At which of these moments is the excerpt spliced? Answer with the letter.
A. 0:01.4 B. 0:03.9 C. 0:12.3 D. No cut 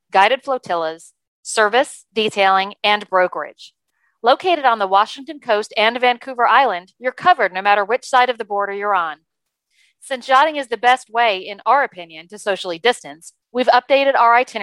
A